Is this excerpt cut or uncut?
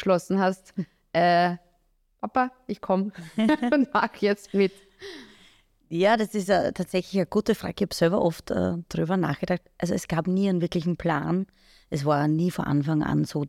uncut